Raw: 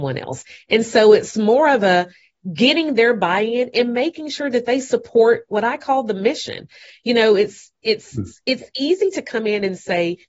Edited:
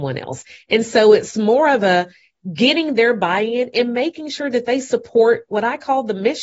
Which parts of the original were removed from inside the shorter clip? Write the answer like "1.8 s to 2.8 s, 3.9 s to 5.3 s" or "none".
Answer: none